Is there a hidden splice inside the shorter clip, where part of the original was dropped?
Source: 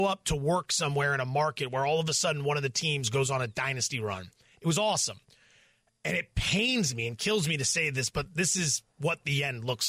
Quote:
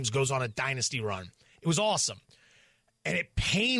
no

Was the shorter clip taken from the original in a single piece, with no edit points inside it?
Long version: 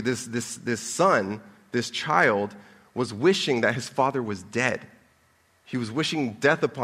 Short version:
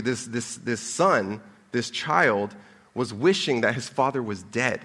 yes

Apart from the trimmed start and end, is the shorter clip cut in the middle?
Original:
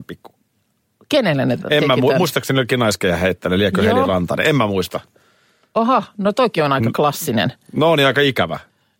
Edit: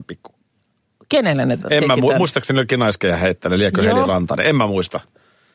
no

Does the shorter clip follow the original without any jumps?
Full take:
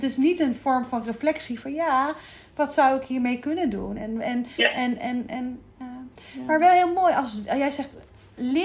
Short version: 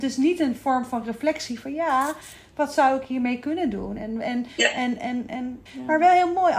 no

